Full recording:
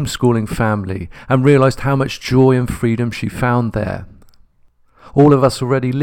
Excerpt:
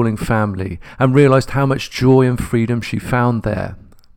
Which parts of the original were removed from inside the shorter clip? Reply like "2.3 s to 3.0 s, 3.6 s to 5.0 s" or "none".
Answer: none

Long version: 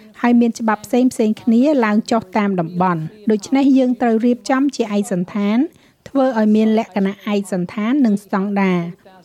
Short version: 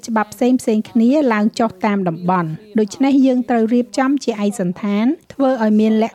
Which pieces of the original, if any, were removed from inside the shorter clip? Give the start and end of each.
5.8 s to 6.0 s

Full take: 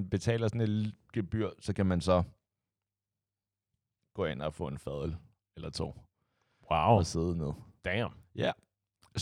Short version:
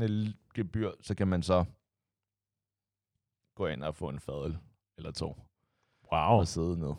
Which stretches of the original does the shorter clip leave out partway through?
none

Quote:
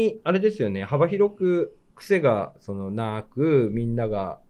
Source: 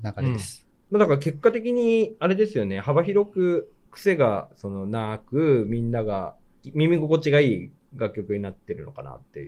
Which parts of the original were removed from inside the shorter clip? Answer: none

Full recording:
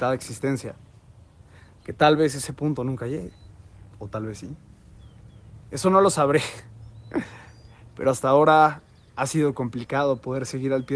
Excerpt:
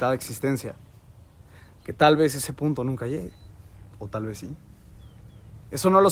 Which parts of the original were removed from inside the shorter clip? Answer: none

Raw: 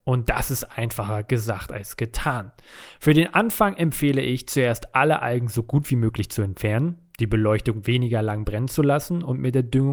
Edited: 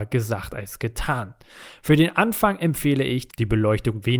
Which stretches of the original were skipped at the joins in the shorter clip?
4.5 s to 7.1 s

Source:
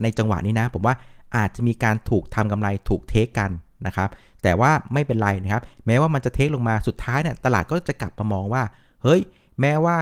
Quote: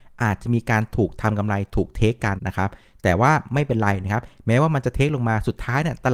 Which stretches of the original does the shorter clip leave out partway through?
3.5 s to 3.8 s

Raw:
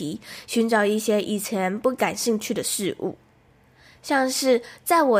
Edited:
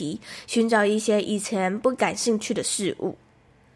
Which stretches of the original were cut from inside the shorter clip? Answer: none

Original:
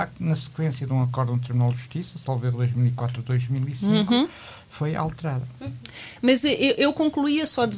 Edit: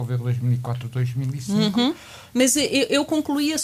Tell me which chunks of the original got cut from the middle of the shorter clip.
4.7 s to 6.2 s

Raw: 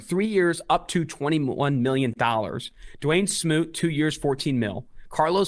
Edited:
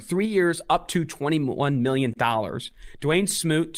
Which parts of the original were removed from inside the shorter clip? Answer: none

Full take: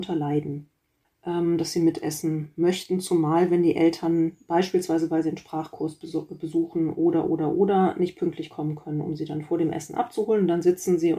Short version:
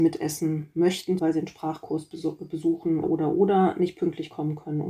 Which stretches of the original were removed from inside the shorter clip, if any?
3.0 s to 5.1 s, 6.9 s to 7.2 s

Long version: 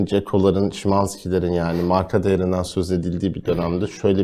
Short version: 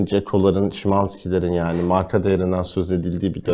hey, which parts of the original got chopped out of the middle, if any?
none

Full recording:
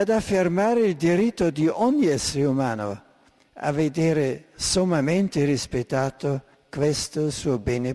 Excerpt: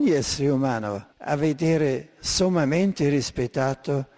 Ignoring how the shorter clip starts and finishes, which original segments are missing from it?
3.1 s to 3.5 s

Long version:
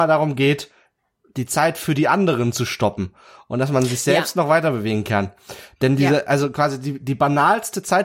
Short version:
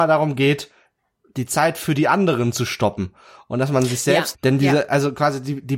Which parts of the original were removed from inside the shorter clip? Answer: 4.3 s to 5.7 s

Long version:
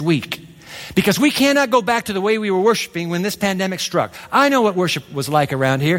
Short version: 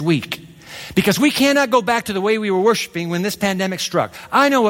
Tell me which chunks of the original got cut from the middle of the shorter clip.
none

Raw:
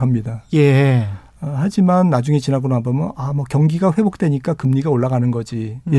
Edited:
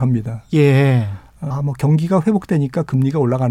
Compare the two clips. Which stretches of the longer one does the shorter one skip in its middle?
1.5 s to 3.2 s

